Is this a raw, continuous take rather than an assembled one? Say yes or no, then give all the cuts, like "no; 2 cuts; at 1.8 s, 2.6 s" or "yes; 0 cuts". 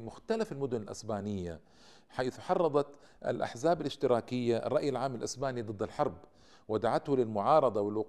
yes; 0 cuts